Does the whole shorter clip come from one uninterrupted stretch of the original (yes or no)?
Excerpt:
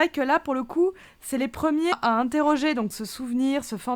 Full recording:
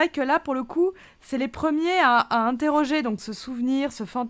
no